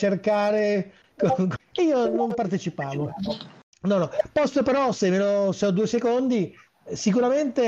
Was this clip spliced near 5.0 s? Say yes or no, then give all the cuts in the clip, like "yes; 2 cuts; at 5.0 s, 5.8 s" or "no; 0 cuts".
no; 2 cuts; at 1.6 s, 3.7 s